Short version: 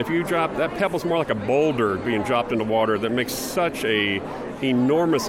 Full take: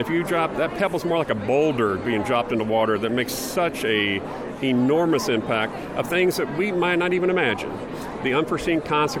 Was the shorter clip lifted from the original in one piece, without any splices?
yes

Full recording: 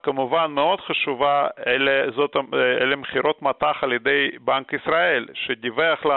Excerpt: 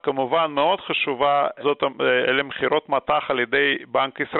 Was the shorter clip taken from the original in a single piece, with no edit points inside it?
no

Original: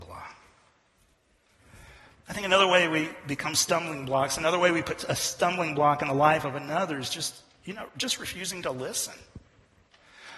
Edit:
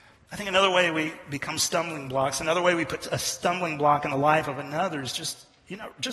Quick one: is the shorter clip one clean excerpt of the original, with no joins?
yes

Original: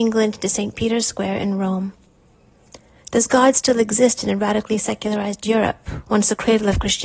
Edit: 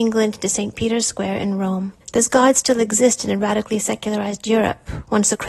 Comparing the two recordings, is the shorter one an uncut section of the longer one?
no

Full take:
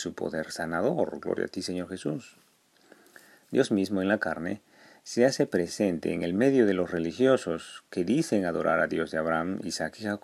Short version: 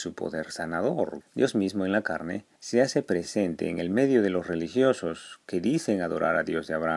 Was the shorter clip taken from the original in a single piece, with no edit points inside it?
no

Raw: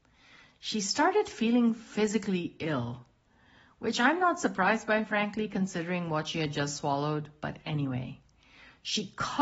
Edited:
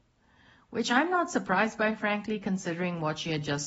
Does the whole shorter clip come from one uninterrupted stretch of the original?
yes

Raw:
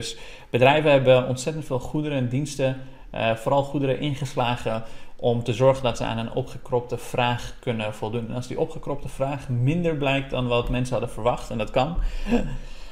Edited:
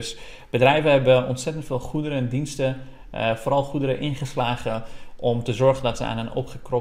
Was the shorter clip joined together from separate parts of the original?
no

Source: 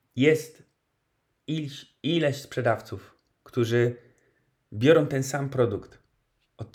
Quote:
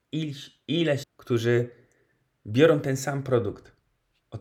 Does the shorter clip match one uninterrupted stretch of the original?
no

